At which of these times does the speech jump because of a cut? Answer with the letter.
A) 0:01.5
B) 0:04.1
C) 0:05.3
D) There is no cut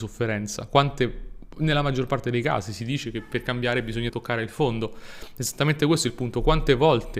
B